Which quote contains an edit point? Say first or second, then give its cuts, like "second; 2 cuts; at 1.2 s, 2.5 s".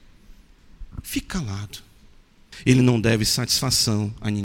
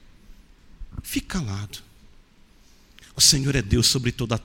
first; 1 cut; at 2.5 s